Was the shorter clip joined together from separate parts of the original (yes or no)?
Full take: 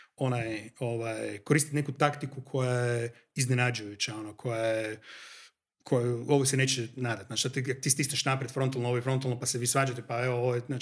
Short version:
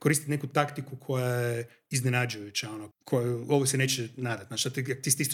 yes